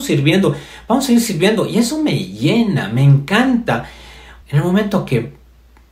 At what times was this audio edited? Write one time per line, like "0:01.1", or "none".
0:04.4

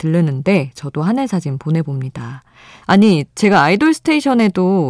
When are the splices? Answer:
0:02.8

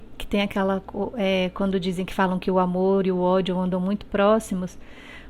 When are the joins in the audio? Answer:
none

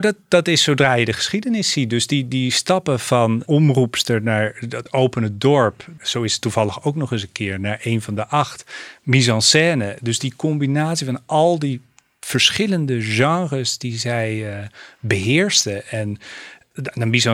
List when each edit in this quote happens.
0:06.0

